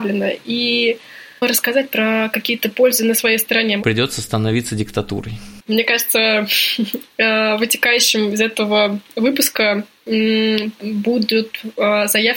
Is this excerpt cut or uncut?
cut